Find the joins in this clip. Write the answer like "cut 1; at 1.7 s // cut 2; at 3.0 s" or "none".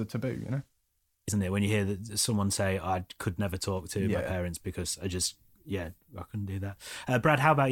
cut 1; at 1.3 s